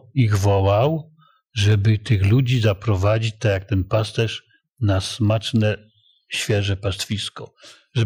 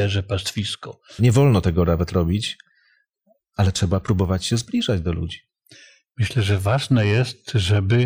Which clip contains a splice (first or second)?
second